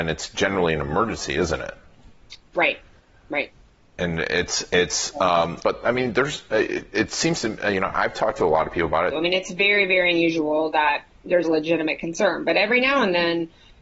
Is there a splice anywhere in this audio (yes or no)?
yes